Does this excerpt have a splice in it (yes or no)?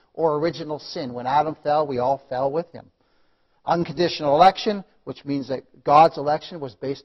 no